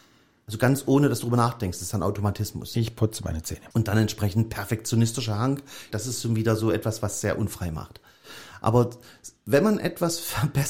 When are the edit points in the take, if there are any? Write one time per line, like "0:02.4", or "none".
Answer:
0:03.7
0:05.9